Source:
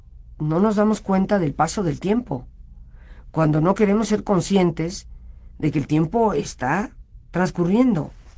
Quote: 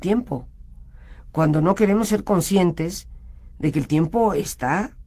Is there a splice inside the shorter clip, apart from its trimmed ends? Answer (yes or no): no